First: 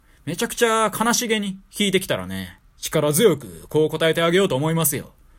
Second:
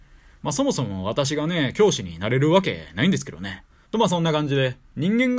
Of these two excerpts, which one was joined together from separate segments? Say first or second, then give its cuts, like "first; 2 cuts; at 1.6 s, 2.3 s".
second; 1 cut; at 3.9 s